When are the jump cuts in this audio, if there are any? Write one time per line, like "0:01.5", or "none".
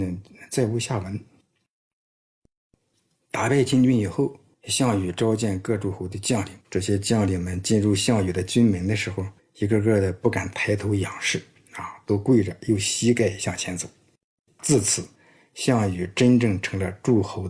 0:06.6

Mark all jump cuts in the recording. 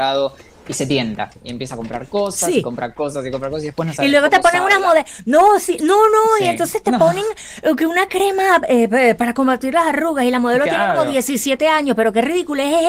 none

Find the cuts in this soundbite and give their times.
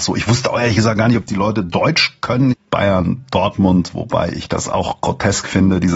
0:02.5

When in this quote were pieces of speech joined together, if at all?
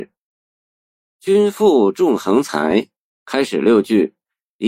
0:03.1

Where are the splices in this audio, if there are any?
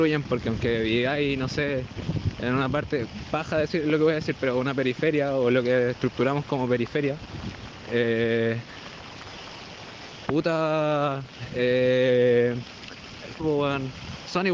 0:10.3
0:13.4

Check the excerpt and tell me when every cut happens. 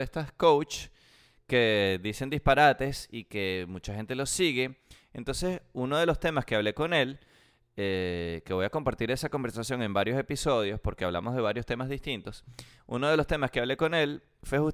none

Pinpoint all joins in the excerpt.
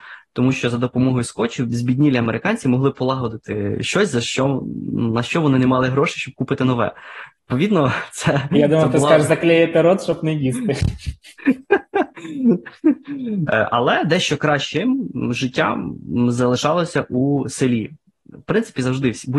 0:13.5

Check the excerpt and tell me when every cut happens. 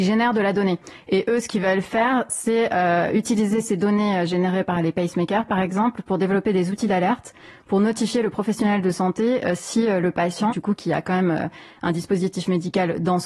0:10.5

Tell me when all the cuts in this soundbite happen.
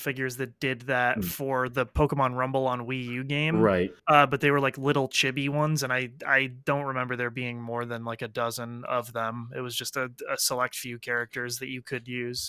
0:04.0

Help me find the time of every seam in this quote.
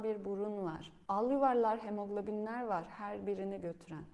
0:01.1

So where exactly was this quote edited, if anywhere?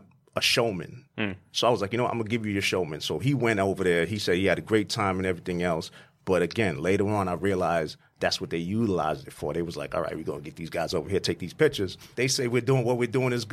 0:12.1

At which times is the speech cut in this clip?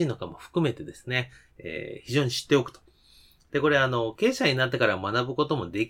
none

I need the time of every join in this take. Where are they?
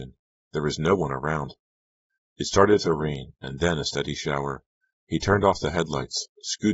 0:03.4

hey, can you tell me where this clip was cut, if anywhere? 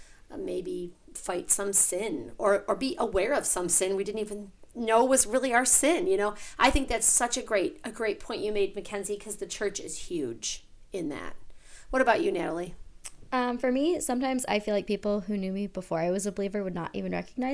none

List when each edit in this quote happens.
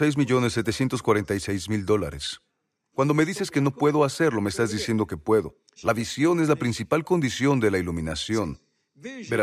0:02.9
0:05.8

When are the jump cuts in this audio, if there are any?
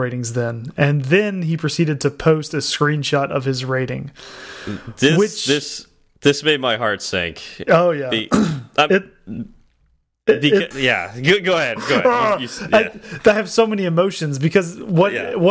0:10.7

